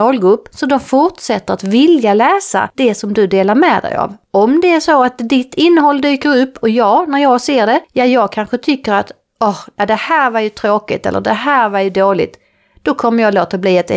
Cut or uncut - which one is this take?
uncut